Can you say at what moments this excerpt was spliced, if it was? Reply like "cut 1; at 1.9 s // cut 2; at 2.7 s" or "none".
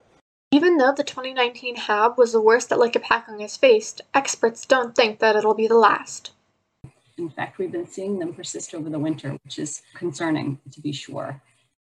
cut 1; at 7.2 s // cut 2; at 9.9 s